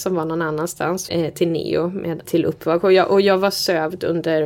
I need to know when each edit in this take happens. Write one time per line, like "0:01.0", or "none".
0:01.1
0:02.2